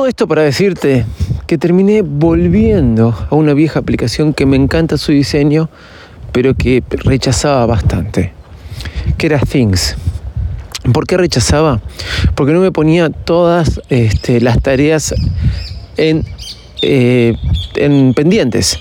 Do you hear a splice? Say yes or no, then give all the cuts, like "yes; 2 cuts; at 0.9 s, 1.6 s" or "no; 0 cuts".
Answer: no; 0 cuts